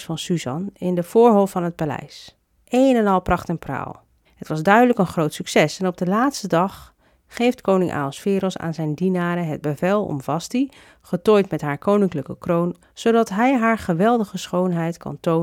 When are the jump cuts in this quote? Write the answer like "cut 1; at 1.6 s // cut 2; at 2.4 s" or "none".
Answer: cut 1; at 4.2 s // cut 2; at 12.8 s